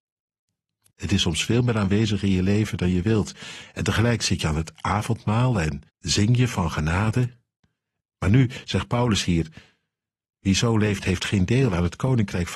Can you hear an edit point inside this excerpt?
yes; 3 cuts; at 0.9 s, 5.9 s, 8.0 s

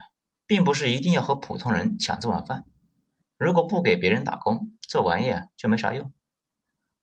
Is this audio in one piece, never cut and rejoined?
no; 1 cut; at 3.2 s

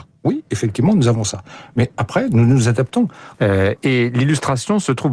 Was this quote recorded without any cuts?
no; 1 cut; at 3.3 s

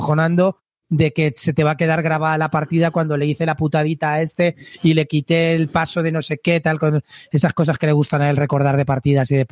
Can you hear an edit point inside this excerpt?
no; 0 cuts

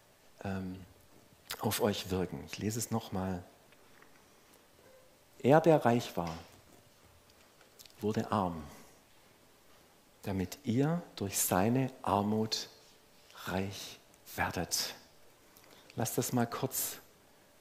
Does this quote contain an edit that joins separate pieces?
yes; 1 cut; at 5.3 s

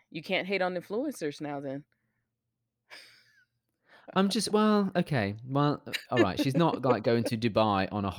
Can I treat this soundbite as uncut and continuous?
yes; 0 cuts

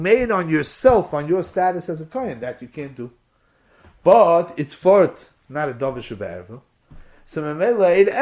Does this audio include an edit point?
no; 0 cuts

